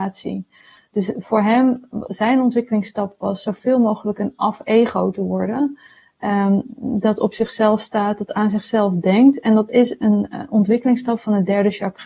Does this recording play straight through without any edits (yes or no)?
yes